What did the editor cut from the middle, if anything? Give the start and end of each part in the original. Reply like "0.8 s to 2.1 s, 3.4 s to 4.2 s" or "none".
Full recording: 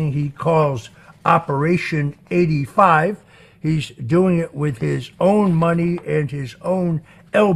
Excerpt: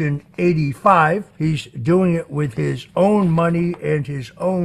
3.3 s to 3.6 s